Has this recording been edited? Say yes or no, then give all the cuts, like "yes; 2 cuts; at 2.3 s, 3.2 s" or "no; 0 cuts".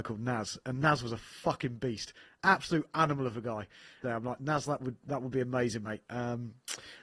yes; 1 cut; at 4.0 s